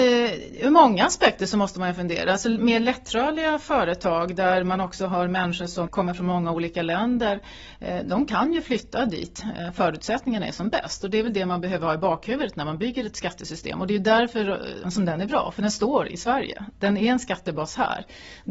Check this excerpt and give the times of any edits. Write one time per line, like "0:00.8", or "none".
0:14.8